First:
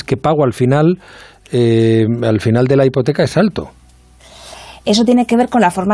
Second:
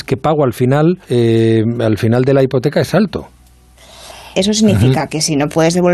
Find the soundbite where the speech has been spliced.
second; 2 cuts; at 1.0 s, 4.3 s

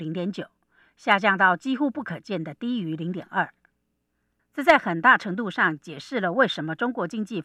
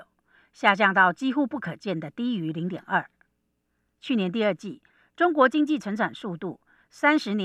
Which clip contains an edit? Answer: first; 1 cut; at 4.4 s

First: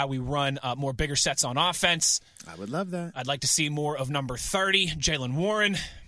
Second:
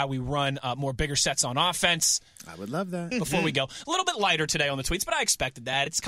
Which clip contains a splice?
second; 1 cut; at 3.1 s

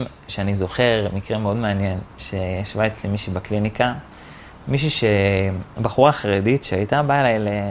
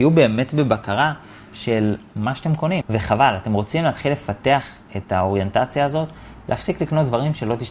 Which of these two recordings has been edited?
second; 1 cut; at 2.8 s

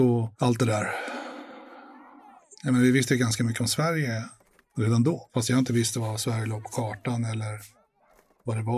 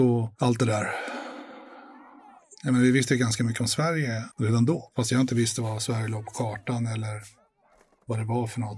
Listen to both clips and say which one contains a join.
second; 1 cut; at 4.3 s

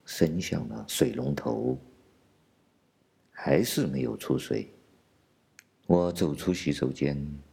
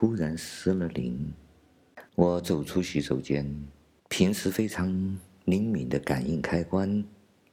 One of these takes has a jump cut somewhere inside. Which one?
second; 2 cuts; at 2.1 s, 4.0 s

